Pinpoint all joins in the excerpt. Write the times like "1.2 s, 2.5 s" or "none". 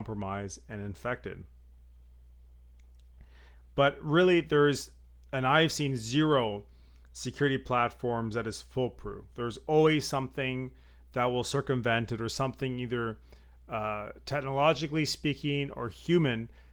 3.5 s